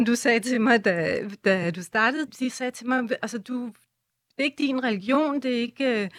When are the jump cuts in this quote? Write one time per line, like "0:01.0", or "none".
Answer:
0:02.3